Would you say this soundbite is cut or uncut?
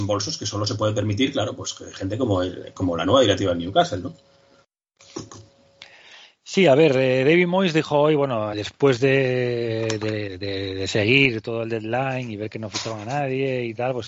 cut